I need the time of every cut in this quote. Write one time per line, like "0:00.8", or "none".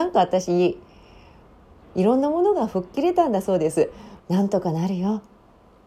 0:01.8
0:04.2